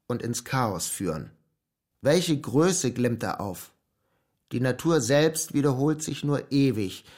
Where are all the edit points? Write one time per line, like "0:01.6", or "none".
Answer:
0:01.9